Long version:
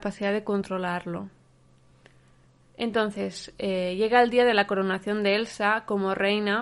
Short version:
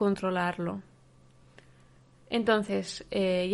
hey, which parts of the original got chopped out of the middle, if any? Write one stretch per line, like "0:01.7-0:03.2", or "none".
none